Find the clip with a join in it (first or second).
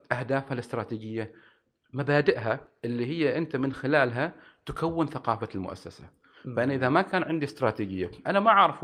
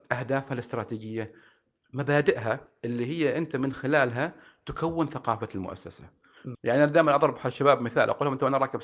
second